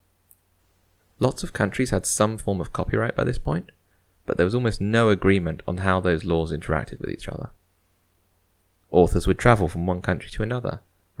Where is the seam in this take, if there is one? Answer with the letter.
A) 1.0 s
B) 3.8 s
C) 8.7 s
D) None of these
A